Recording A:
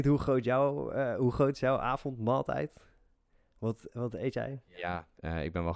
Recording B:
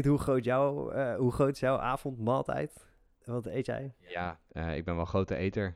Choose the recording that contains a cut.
B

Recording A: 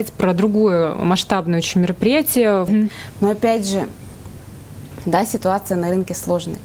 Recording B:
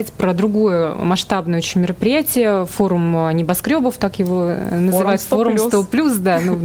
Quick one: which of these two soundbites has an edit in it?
A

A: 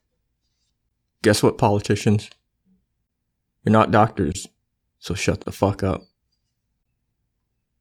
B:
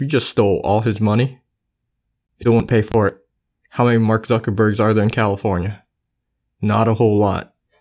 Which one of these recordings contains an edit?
B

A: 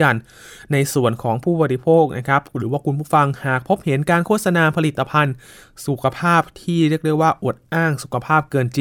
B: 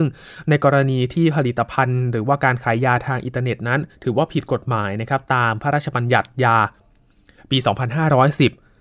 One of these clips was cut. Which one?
B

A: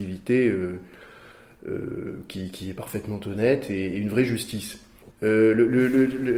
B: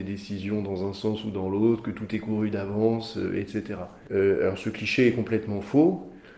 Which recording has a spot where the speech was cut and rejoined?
A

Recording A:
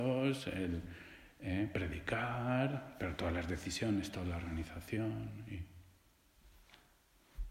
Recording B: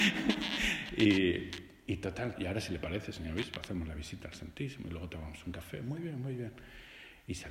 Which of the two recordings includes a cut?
B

